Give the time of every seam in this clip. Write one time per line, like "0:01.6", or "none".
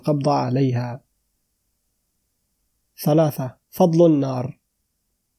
0:03.6